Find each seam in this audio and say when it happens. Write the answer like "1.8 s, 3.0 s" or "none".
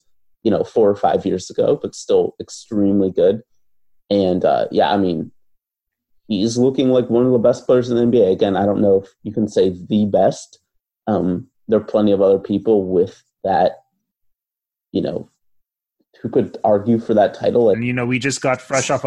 17.7 s